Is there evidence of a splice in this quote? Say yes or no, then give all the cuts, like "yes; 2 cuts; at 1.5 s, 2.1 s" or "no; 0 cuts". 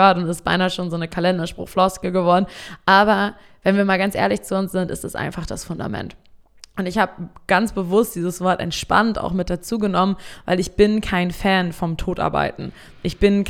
no; 0 cuts